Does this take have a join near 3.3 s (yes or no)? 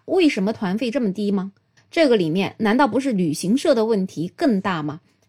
no